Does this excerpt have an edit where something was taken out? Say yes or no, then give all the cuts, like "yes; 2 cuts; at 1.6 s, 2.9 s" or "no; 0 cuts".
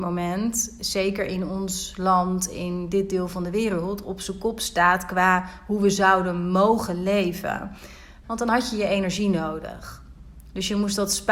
yes; 1 cut; at 8.2 s